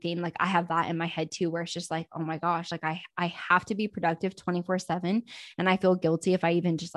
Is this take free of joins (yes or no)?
yes